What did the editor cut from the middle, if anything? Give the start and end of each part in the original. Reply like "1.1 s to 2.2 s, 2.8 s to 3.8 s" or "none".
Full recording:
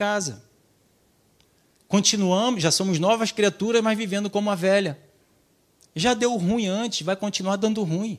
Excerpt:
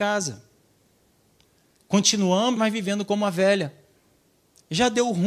2.6 s to 3.8 s

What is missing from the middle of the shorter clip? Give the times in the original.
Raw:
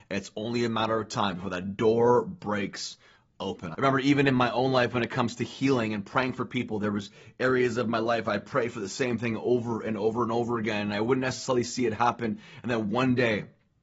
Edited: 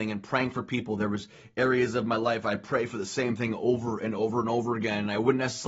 none

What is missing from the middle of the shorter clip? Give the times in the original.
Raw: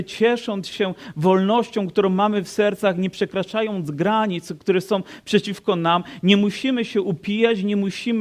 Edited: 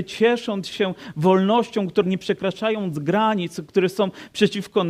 2.0 s to 2.9 s

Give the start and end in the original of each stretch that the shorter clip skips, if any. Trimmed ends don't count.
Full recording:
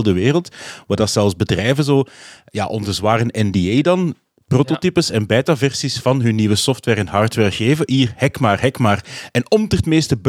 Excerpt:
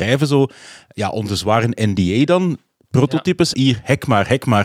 5.1 s to 7.9 s

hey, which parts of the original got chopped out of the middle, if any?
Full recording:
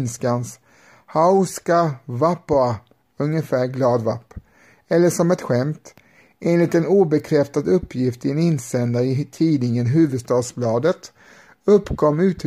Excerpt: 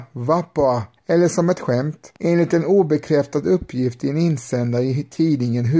2.9 s to 4.8 s, 6.0 s to 6.4 s

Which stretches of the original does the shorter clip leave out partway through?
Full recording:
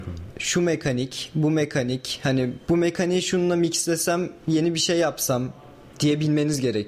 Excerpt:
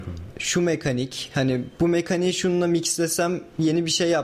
1.3 s to 2.2 s

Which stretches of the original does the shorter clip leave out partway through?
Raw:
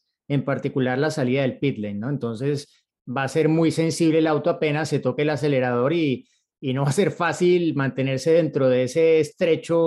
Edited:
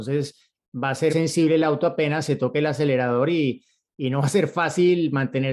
3.4 s to 3.7 s

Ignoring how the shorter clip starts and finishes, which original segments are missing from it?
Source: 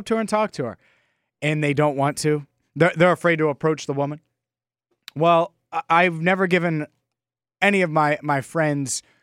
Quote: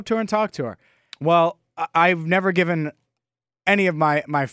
1.1 s to 5.1 s

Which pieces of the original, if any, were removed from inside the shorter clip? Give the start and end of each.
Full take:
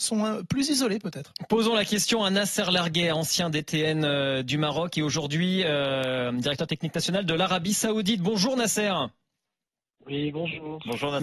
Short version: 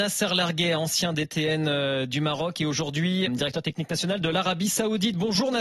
5.6 s to 6.3 s

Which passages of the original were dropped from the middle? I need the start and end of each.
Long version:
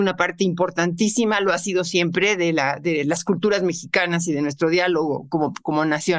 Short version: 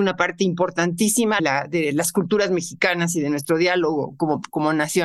1.4 s to 2.5 s

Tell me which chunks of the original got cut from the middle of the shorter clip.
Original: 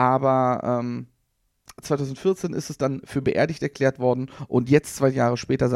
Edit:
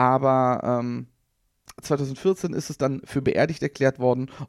none

